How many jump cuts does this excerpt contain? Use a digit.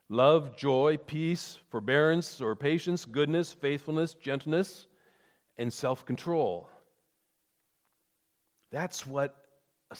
1